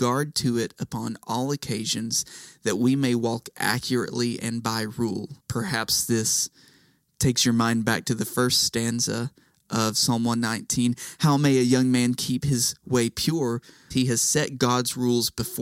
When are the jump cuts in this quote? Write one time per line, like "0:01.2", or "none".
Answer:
0:05.4
0:13.9

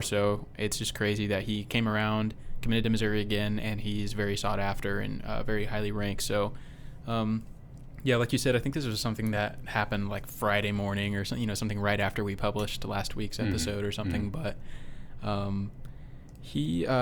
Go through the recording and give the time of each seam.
none

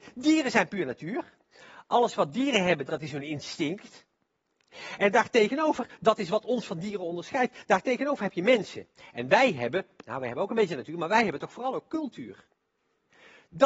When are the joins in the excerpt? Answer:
0:02.9

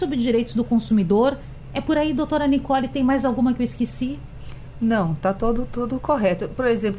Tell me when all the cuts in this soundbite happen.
none

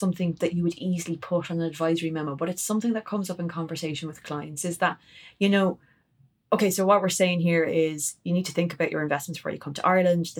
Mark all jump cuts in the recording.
none

